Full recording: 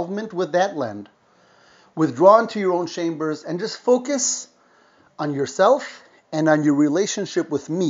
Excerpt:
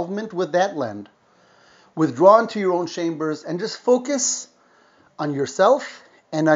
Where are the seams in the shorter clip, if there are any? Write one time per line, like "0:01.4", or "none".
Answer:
none